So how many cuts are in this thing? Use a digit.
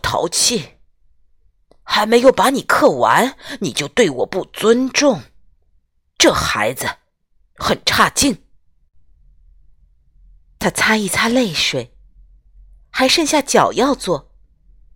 0